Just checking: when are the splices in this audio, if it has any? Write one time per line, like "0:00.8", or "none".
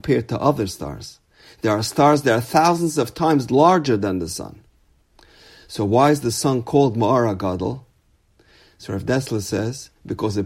none